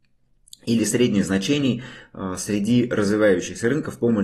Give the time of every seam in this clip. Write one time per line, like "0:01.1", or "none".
none